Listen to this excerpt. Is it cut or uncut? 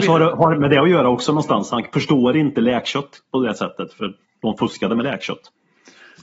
uncut